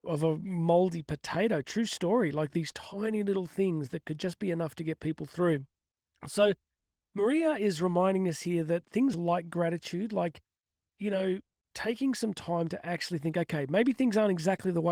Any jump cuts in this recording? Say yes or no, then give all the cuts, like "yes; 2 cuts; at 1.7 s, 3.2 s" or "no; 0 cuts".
no; 0 cuts